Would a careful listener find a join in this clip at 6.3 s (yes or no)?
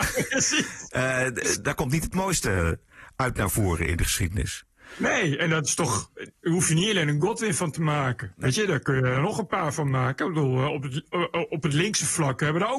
no